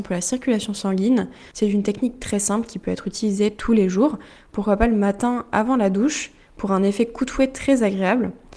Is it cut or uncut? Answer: cut